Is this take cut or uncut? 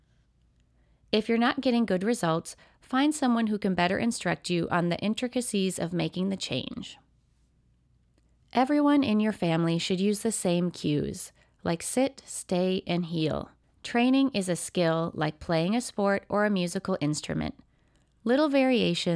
cut